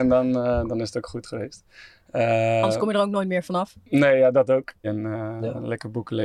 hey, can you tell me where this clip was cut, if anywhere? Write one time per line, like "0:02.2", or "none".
0:04.8